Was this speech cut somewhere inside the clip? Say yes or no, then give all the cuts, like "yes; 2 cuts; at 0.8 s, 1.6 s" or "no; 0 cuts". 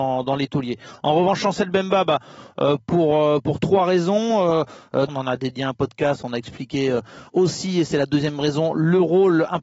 yes; 1 cut; at 5.1 s